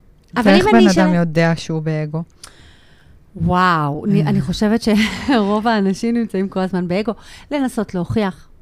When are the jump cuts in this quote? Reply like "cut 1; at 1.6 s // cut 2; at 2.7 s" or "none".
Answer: none